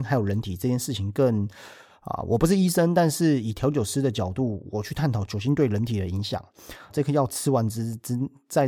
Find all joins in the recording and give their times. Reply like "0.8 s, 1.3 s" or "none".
6.9 s